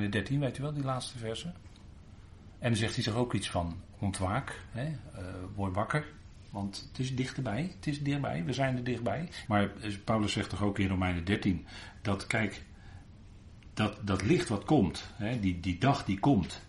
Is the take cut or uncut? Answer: cut